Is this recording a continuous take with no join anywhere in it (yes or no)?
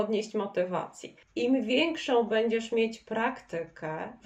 no